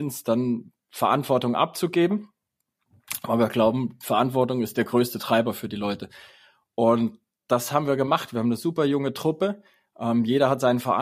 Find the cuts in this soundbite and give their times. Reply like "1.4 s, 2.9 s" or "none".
none